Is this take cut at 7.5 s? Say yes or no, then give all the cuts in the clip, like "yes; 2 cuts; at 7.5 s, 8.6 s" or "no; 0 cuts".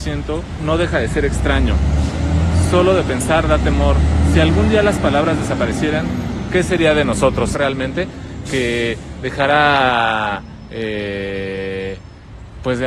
yes; 1 cut; at 7.5 s